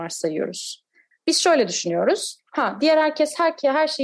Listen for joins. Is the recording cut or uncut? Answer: cut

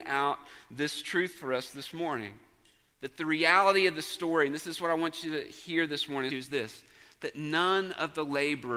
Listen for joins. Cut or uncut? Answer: cut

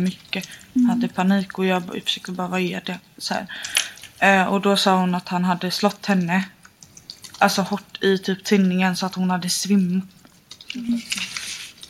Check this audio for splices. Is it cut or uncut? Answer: cut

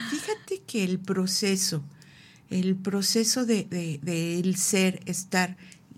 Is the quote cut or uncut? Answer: uncut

